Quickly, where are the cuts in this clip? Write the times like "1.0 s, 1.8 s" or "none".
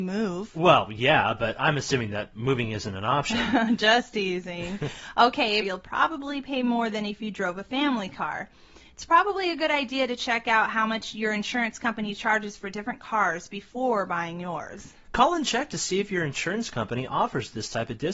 5.6 s, 15.0 s